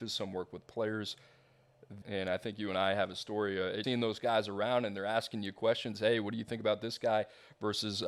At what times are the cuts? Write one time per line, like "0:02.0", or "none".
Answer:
0:02.0
0:03.8